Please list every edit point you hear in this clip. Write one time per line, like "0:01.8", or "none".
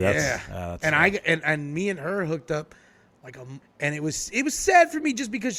0:03.6

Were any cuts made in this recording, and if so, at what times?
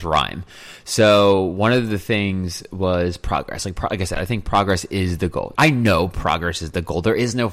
0:05.5

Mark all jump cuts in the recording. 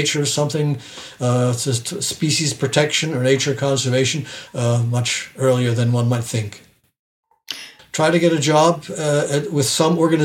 0:04.5
0:07.8

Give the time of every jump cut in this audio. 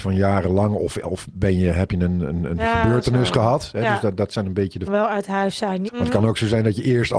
0:04.9
0:05.9

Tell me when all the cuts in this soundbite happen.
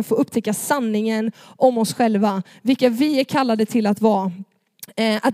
none

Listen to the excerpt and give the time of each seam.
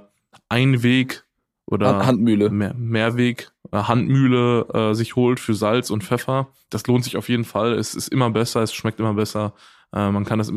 none

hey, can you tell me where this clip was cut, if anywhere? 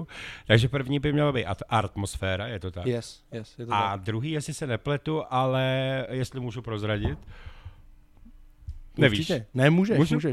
none

